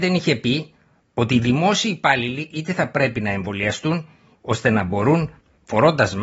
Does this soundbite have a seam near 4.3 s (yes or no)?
yes